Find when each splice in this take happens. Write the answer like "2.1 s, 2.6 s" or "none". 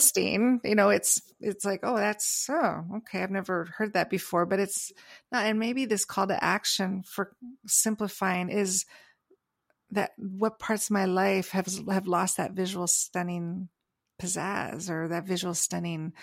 none